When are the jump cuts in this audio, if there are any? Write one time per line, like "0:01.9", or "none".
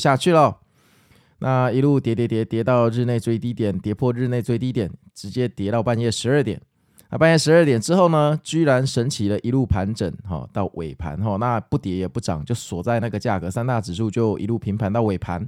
none